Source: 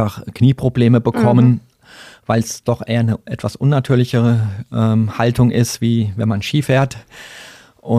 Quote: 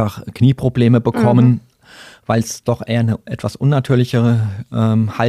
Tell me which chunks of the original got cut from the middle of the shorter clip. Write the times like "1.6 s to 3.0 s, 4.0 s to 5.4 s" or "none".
none